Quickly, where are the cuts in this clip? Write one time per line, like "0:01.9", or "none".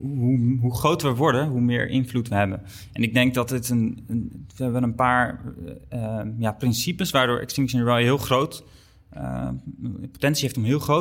none